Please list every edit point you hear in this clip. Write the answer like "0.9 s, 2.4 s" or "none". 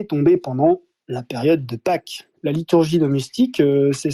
2.4 s